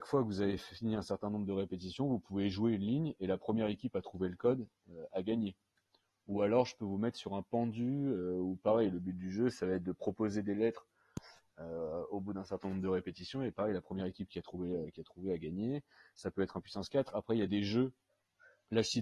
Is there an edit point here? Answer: no; 0 cuts

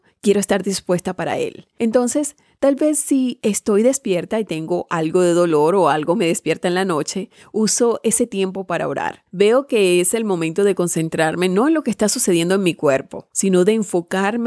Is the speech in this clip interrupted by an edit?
no; 0 cuts

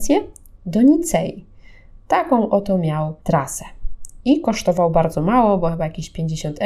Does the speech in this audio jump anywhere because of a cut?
yes; 1 cut; at 3.2 s

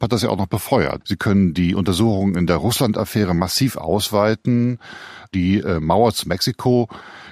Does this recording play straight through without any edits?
no; 1 cut; at 1.0 s

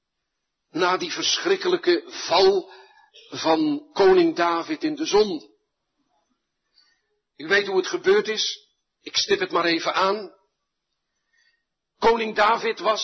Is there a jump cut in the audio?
no; 0 cuts

